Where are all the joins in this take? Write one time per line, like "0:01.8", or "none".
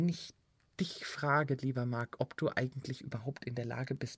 none